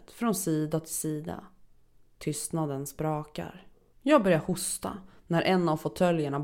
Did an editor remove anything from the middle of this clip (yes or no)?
yes